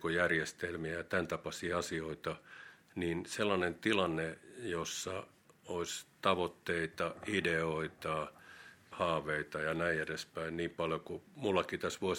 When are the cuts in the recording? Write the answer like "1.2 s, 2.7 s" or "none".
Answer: 8.9 s